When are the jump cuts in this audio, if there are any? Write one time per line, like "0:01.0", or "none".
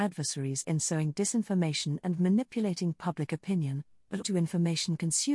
0:04.2